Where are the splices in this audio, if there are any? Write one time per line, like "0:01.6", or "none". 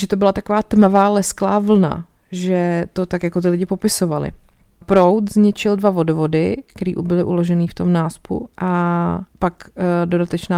0:04.8
0:09.3